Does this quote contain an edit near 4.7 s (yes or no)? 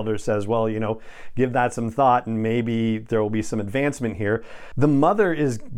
yes